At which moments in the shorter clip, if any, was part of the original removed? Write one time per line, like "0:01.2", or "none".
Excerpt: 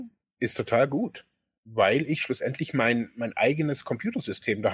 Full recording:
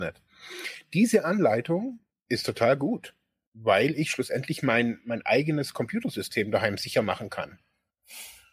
none

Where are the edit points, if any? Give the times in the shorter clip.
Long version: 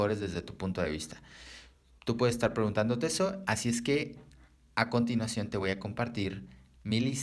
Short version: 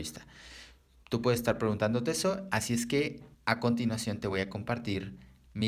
0:03.3

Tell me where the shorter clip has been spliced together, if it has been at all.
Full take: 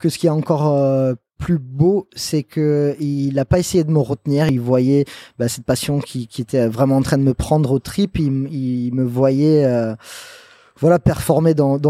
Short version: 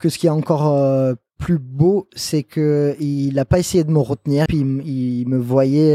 0:04.5

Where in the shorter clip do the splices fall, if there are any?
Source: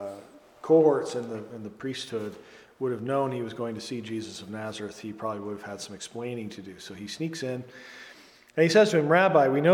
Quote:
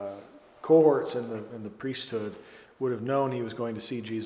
none

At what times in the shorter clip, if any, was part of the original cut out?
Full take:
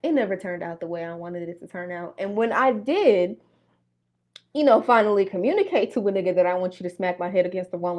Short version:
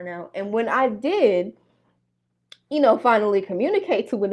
none

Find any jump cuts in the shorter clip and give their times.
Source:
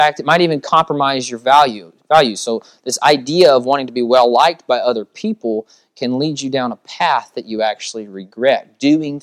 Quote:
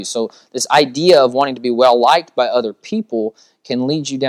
none

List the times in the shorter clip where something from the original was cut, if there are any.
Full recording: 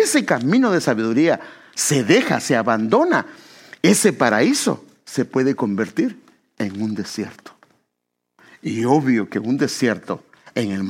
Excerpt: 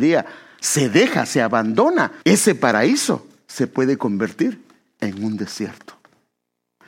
0:02.2

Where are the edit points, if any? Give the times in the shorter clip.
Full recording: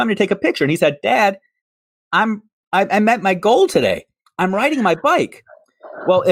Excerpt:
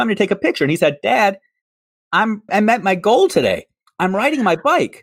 0:02.5

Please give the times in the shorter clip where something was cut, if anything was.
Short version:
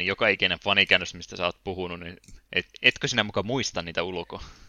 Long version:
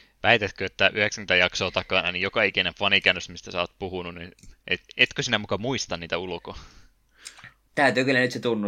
none

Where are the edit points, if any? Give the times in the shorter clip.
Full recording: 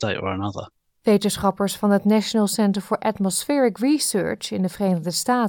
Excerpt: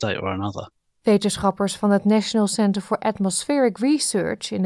none

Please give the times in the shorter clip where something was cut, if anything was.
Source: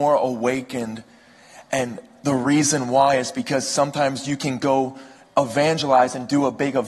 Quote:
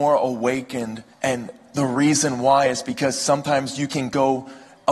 0:01.1

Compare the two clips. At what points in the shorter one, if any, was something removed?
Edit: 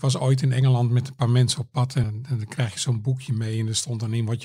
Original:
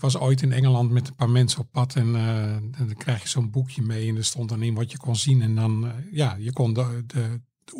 0:02.0

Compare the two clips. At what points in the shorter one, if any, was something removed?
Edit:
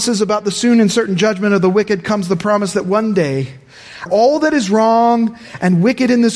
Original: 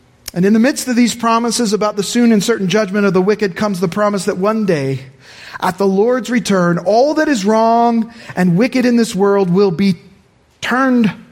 0:04.1

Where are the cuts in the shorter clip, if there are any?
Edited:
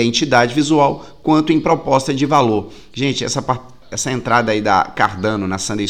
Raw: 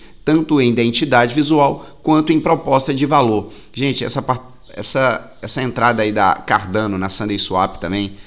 0:03.8

